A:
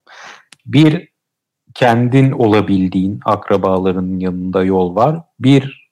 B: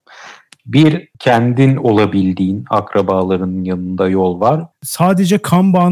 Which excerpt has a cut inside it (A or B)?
B